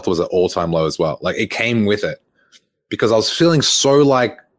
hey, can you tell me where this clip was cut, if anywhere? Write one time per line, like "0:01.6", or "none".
none